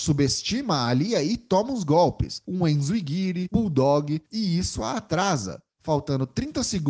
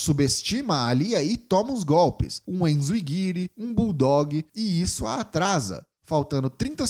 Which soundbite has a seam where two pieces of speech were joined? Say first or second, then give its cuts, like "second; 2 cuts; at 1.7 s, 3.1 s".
first; 1 cut; at 3.5 s